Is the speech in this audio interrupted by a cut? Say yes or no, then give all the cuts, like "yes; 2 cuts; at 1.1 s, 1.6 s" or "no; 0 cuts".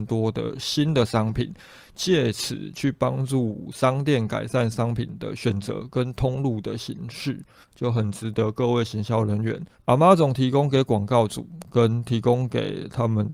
yes; 2 cuts; at 7.6 s, 9.7 s